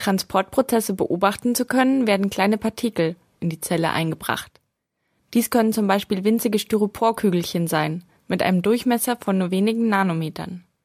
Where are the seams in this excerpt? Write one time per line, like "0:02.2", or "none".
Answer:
0:03.4